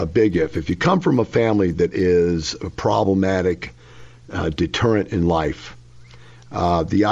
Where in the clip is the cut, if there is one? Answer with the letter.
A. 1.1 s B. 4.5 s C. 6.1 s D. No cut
D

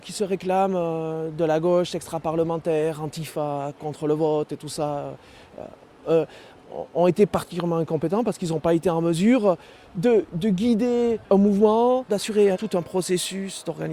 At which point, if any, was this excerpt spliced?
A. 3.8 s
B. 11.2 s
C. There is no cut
B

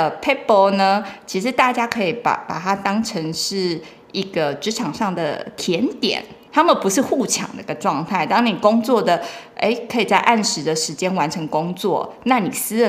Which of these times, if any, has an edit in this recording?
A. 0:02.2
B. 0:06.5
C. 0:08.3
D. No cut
B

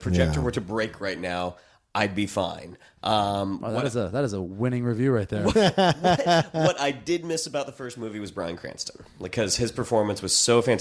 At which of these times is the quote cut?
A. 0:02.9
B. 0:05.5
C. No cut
C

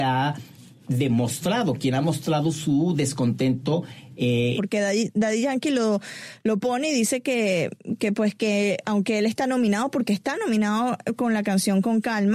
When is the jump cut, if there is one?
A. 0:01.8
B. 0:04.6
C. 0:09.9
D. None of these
B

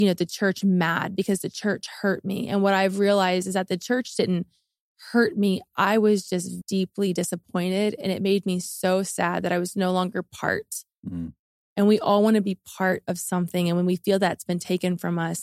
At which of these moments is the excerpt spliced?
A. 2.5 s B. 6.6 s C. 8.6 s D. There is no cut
B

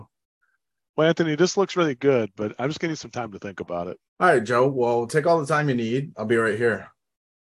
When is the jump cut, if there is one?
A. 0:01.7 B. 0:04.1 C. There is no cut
B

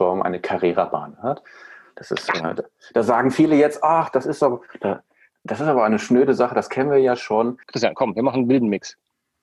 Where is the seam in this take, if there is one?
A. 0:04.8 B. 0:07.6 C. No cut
B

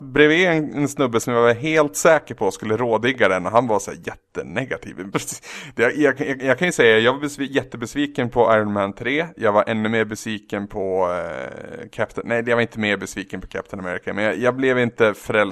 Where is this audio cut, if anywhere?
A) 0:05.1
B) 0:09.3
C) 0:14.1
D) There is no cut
A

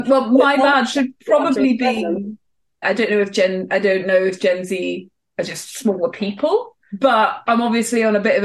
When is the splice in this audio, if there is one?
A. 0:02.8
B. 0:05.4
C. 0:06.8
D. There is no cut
A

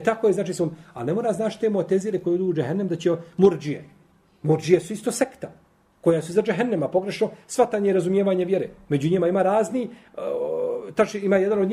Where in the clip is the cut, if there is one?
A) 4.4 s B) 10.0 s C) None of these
C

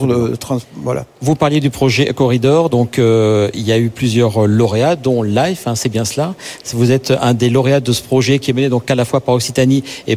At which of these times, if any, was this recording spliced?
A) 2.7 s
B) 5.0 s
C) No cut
C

